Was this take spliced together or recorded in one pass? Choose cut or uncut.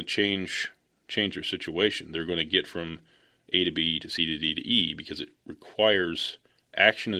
uncut